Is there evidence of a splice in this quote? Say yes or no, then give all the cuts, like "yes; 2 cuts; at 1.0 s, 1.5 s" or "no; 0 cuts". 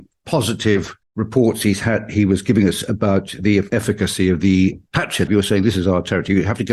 yes; 2 cuts; at 1.0 s, 5.3 s